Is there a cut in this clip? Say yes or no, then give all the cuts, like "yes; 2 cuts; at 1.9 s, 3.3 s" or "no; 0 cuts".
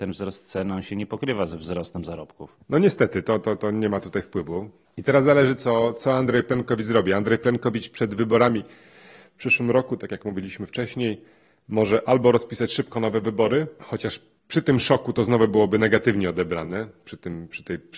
no; 0 cuts